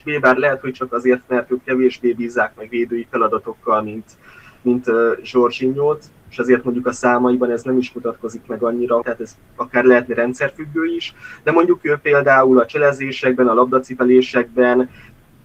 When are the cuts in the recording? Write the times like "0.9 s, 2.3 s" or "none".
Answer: 9.0 s